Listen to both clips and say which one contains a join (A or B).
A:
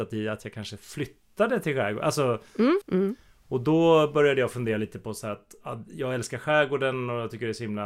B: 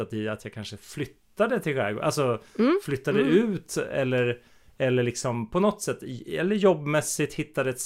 A